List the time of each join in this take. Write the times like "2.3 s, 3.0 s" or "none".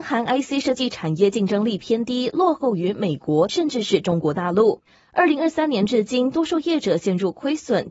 3.5 s